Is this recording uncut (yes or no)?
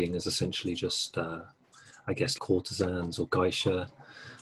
no